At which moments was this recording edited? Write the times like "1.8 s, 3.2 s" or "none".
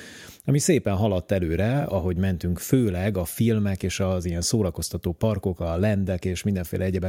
none